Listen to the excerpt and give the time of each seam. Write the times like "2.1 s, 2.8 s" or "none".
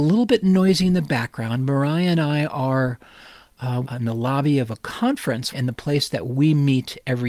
3.8 s, 5.5 s